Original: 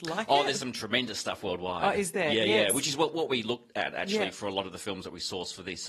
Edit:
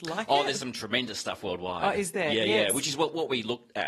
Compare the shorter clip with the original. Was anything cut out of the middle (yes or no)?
no